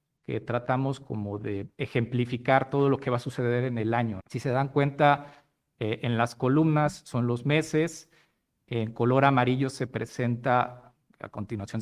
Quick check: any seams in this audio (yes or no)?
yes